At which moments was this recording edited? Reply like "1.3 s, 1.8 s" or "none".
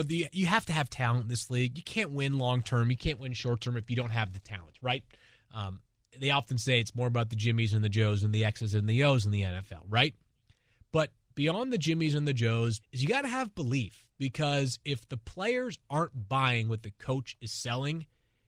12.8 s